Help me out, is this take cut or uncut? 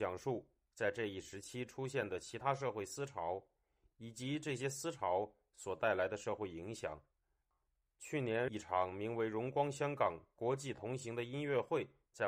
uncut